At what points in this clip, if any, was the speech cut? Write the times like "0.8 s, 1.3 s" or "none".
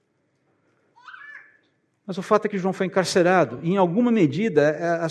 none

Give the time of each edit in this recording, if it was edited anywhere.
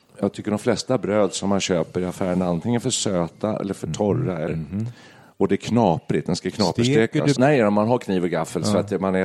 4.5 s, 7.4 s

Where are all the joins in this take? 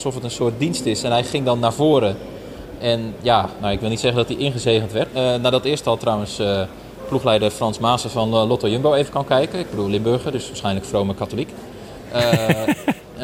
5.1 s

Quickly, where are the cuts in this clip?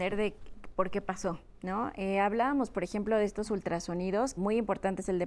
4.4 s

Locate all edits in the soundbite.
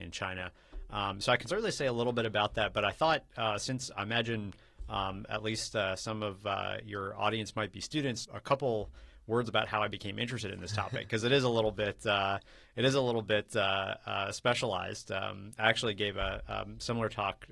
8.2 s

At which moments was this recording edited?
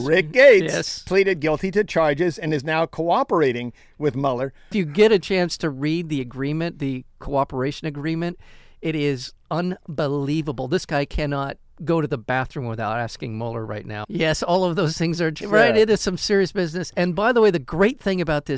14.0 s, 15.4 s

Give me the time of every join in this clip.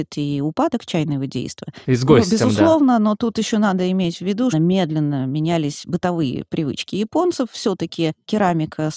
1.8 s, 4.5 s

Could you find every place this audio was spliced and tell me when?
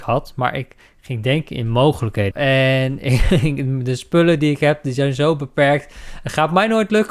2.3 s

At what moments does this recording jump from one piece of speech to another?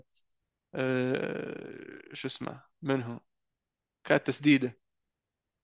2.7 s

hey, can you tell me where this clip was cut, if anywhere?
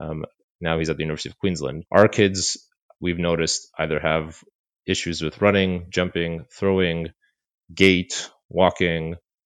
1.9 s

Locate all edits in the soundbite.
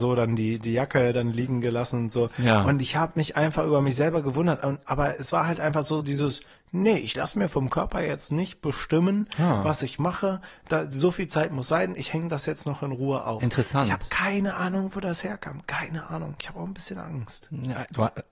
6.0 s

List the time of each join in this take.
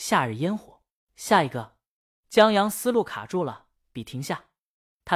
1.0 s

